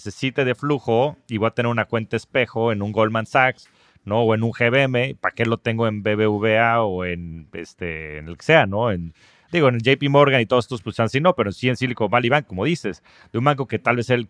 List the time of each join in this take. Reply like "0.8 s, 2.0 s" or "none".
12.5 s